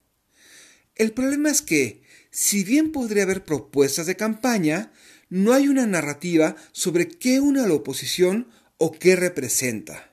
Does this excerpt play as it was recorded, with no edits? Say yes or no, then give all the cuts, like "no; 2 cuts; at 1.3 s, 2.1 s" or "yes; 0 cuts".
yes; 0 cuts